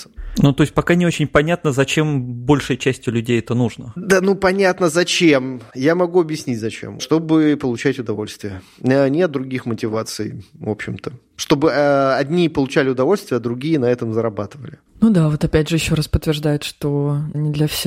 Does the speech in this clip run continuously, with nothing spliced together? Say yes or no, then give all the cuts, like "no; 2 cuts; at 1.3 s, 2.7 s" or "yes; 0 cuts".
no; 1 cut; at 7.0 s